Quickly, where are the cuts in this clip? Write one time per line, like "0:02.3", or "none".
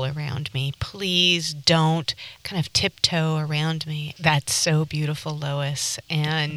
0:04.2